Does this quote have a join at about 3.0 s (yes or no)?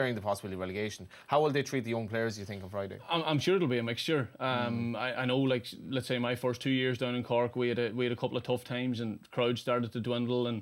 no